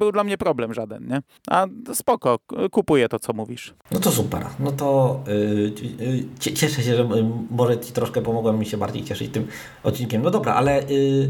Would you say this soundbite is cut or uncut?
uncut